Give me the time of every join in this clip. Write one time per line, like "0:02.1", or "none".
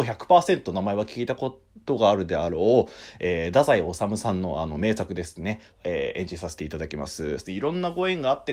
0:05.7
0:07.4